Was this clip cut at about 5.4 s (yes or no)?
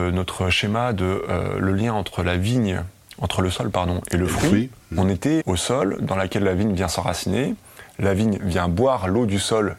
yes